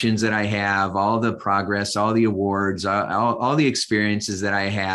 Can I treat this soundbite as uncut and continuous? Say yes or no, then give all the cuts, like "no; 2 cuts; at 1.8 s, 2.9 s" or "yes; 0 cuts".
yes; 0 cuts